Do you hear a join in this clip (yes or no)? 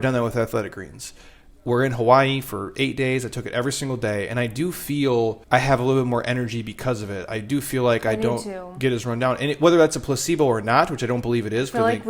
yes